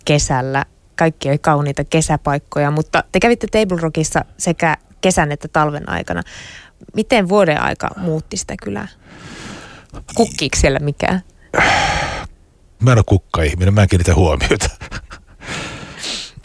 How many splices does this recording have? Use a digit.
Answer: 2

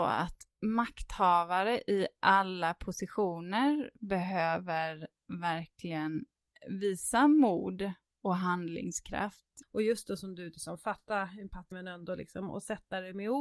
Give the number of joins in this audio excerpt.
2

